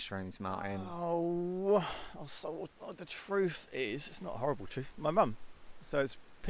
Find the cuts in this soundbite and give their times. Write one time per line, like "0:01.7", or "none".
none